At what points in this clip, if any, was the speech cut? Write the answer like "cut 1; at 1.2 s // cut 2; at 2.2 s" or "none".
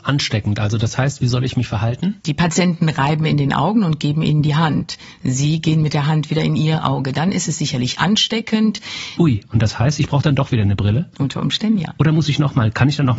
cut 1; at 2.2 s // cut 2; at 9.2 s